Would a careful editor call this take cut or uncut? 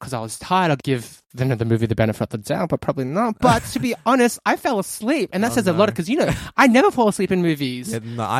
uncut